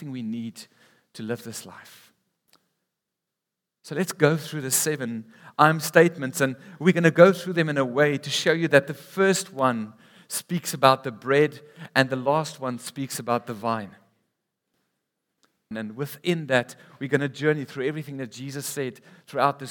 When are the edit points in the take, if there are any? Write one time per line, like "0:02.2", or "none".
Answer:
0:15.7